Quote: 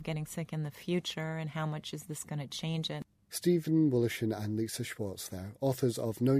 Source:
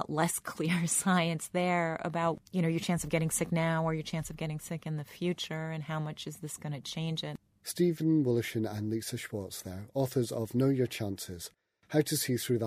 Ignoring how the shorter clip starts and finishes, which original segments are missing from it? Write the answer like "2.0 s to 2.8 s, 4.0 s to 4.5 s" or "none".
none